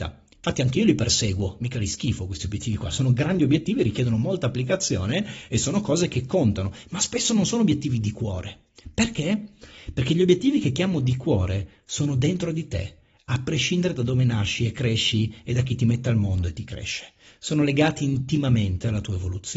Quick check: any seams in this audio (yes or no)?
no